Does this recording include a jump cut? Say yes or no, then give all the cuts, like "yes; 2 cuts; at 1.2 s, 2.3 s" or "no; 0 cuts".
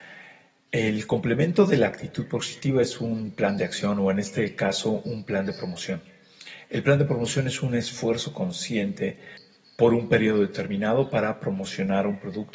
no; 0 cuts